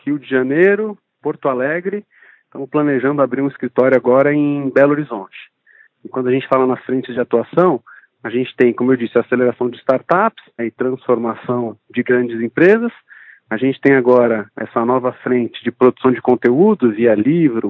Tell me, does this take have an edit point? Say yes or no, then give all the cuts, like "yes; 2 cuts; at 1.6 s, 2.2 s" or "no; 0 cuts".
yes; 1 cut; at 10.6 s